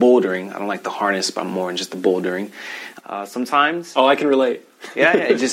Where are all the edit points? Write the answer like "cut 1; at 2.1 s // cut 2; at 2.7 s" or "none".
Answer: cut 1; at 3.0 s